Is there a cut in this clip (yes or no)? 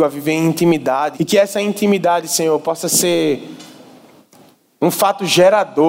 yes